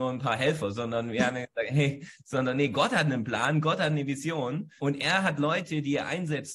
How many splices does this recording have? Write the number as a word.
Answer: one